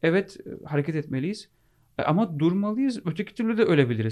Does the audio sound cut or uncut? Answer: uncut